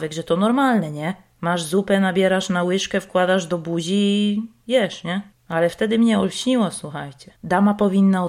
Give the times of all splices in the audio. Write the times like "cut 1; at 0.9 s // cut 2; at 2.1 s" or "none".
cut 1; at 5.3 s // cut 2; at 7.4 s